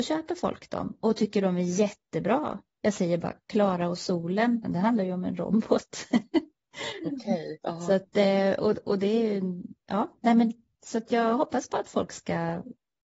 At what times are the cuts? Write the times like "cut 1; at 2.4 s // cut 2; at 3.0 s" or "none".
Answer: cut 1; at 4.6 s